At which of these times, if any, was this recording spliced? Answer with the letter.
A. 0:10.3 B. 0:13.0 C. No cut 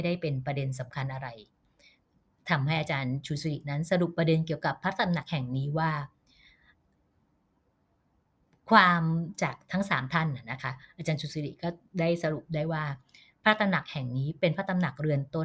C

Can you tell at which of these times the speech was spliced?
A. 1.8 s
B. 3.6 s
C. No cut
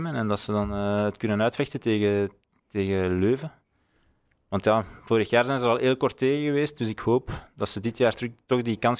C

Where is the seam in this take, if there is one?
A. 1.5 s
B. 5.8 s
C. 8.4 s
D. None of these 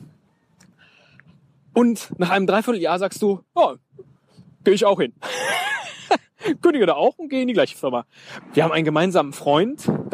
C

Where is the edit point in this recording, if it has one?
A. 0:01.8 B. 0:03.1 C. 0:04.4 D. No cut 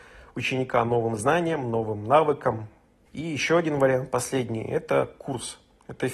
B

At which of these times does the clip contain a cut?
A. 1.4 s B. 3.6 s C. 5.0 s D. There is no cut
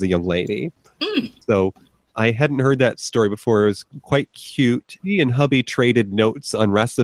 C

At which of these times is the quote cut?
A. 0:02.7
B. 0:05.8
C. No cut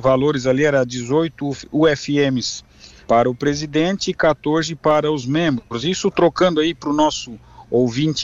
C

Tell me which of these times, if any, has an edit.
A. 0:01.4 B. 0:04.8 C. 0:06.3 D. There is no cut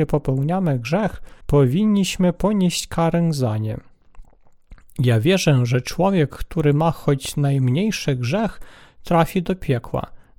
A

